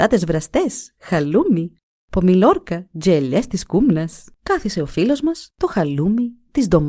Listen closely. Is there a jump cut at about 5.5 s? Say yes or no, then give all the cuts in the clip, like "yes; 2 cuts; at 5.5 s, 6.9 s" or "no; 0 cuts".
yes; 2 cuts; at 4.3 s, 5.5 s